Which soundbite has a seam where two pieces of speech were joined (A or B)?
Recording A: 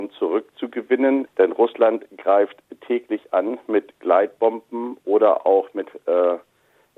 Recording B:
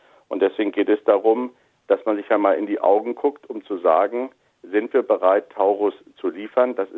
A